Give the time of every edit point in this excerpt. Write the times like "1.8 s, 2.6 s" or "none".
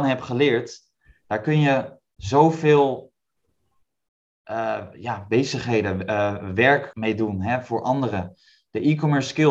6.9 s